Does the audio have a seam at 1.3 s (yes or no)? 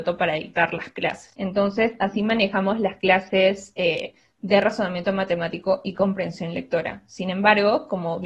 no